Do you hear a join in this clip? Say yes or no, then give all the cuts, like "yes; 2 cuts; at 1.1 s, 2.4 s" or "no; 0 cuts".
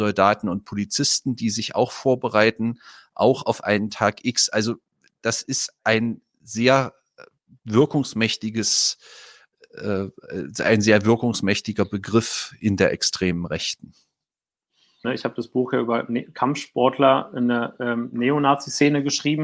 yes; 1 cut; at 15.0 s